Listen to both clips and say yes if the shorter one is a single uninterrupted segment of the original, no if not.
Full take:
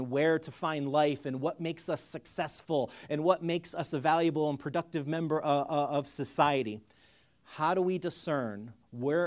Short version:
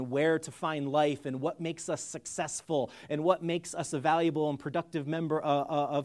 yes